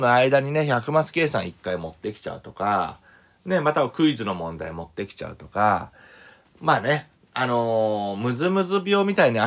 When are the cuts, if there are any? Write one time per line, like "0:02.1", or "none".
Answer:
none